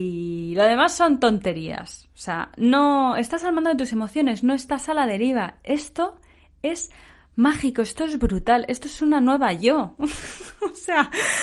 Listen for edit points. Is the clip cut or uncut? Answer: uncut